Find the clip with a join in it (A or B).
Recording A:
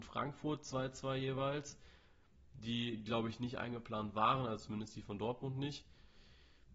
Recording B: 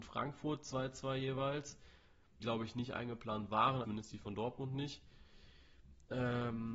B